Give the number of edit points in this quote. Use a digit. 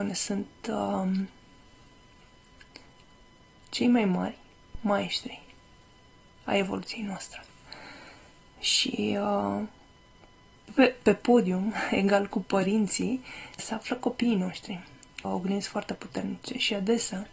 2